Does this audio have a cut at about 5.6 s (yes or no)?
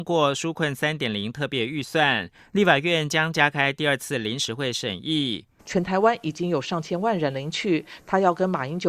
yes